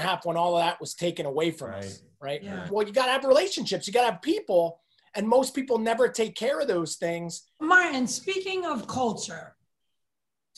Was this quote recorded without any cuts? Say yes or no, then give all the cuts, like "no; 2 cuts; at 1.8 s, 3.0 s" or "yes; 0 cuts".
no; 2 cuts; at 2.7 s, 7.6 s